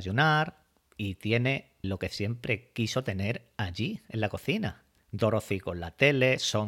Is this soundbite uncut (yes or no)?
no